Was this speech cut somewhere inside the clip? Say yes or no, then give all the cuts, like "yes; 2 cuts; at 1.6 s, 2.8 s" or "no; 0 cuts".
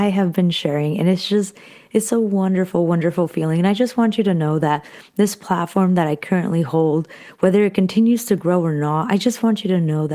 no; 0 cuts